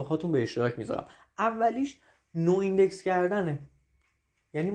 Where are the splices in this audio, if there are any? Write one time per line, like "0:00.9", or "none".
none